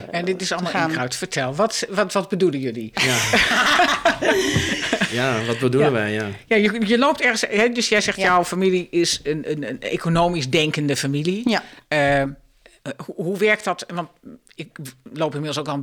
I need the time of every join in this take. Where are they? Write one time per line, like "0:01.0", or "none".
none